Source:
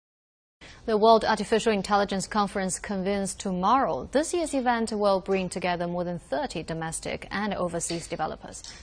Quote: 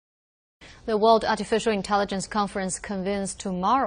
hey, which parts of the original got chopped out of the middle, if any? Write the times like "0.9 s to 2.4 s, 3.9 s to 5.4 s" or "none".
none